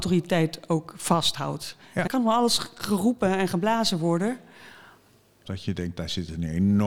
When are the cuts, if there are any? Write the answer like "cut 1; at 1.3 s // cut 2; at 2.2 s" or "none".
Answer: cut 1; at 2.1 s // cut 2; at 5.4 s